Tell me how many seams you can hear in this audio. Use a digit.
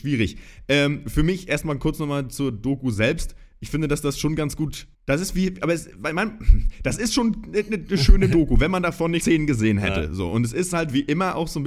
2